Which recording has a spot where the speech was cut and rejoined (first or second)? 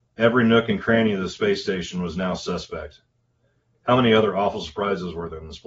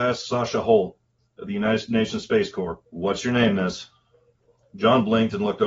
second